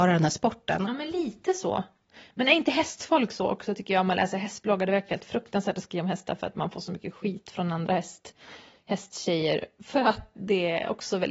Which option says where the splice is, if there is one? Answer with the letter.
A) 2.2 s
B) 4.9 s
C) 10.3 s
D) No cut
C